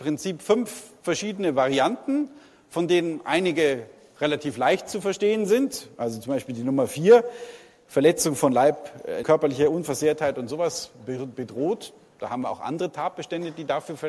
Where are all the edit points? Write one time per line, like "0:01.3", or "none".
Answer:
0:09.2